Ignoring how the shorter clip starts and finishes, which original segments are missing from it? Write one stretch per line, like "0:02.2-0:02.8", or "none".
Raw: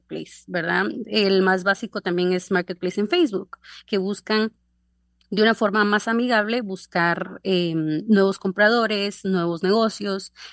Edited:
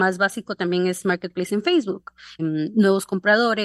0:03.8-0:07.7